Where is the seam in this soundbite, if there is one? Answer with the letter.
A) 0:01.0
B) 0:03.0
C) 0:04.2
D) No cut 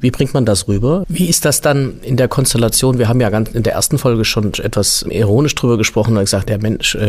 A